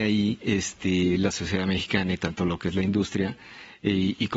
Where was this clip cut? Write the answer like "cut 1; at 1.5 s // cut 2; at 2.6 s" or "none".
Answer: none